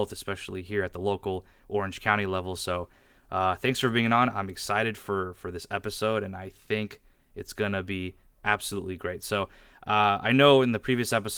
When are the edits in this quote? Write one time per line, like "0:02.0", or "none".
none

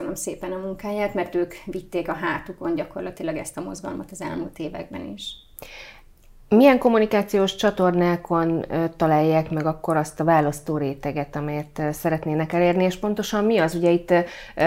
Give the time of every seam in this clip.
none

